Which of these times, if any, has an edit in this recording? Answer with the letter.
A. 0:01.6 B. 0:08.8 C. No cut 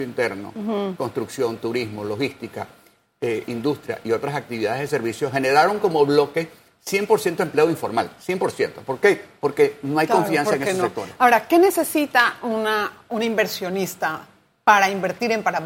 C